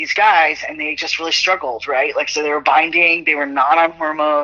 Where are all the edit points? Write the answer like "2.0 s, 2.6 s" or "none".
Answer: none